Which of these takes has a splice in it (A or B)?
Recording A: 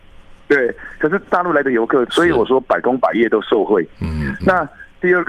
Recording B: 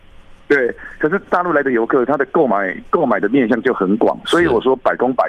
A